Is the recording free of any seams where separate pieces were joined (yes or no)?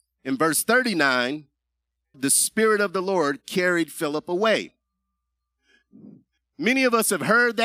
no